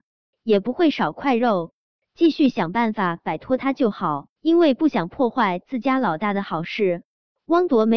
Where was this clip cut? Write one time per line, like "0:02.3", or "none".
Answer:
0:02.0
0:04.4

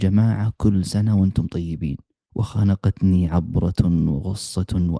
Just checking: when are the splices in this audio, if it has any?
0:02.2

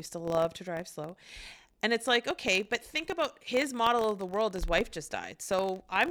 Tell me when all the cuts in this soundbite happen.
none

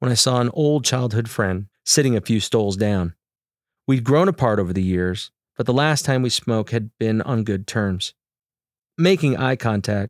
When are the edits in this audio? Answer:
0:01.7

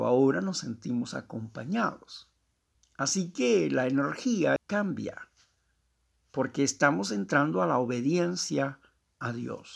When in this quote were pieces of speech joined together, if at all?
0:02.7
0:04.6

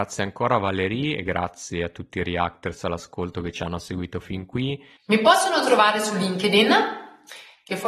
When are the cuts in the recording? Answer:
0:05.0

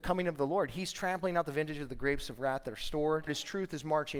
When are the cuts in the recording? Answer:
0:03.3

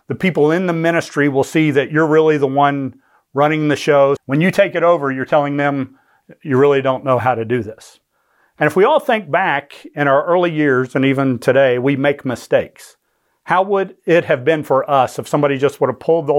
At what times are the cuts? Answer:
0:04.2

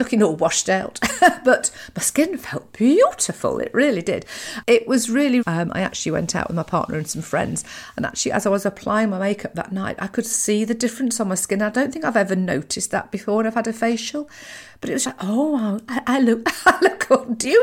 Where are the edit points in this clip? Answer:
0:05.4
0:15.0
0:16.4

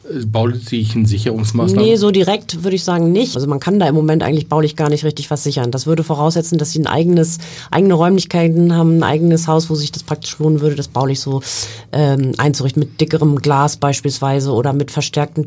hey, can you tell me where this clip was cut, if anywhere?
0:03.3

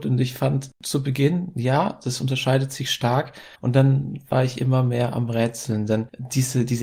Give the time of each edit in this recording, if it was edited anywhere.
0:03.6

